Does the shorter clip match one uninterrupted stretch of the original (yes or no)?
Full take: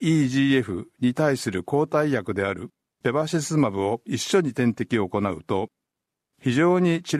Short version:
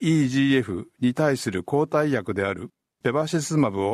yes